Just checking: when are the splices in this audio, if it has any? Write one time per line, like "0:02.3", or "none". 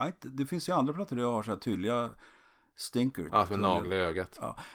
0:03.3